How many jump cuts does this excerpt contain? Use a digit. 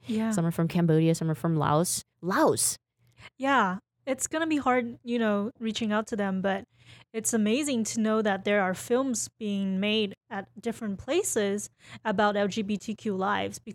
0